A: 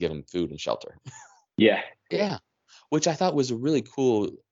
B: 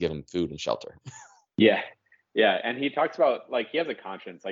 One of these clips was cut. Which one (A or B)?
A